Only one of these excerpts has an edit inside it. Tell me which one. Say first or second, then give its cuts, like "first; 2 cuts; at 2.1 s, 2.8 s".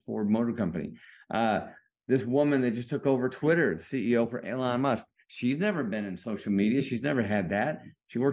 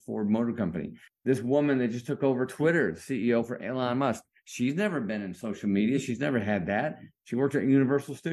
second; 1 cut; at 1.1 s